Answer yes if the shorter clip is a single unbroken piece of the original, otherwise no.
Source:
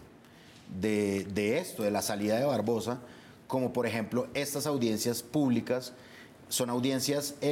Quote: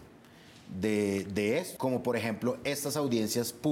no